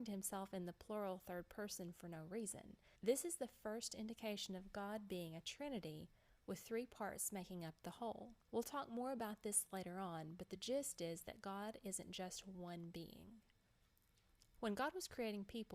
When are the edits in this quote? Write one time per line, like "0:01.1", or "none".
0:03.0
0:08.4